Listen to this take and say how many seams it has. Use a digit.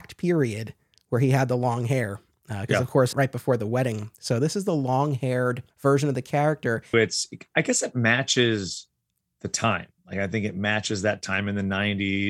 3